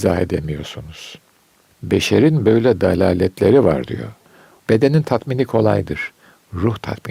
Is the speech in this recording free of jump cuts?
no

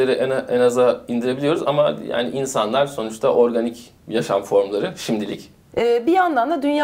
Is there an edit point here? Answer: yes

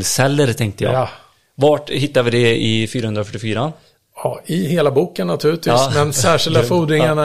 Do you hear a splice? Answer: no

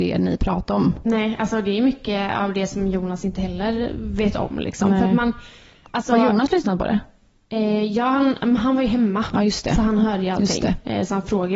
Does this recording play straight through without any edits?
yes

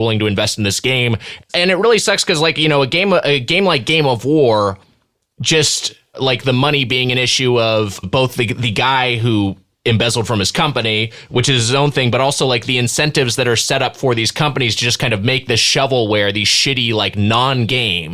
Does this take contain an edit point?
yes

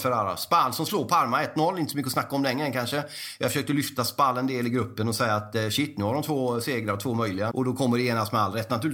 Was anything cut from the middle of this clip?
yes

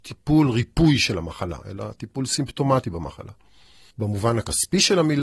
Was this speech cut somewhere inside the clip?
yes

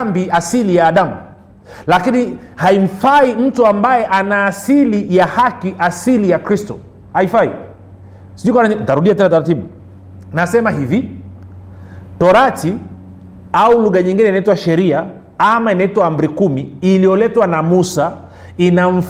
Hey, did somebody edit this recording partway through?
no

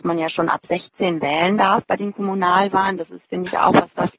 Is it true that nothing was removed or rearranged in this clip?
yes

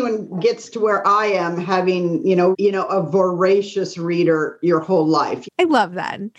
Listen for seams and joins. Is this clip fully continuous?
no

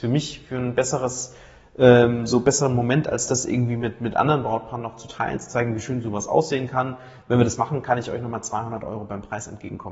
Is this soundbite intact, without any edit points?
yes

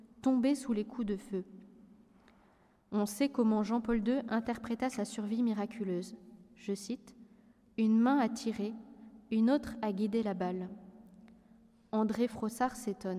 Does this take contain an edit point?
no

